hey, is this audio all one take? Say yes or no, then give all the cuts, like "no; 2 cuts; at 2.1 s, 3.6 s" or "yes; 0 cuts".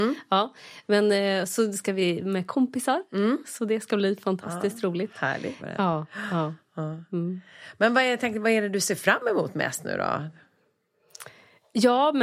no; 1 cut; at 5.6 s